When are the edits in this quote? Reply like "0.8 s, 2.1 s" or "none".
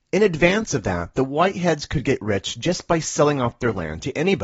none